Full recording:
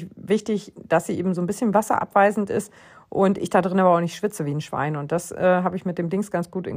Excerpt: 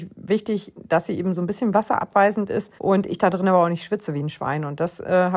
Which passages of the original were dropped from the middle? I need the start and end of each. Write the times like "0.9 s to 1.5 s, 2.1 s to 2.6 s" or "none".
2.8 s to 3.1 s